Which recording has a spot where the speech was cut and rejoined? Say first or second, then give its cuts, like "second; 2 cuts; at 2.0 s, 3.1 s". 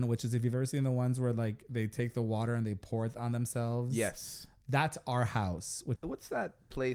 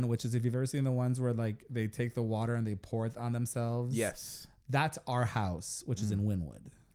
first; 1 cut; at 6.0 s